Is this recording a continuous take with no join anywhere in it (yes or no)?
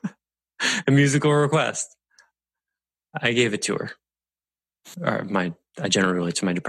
yes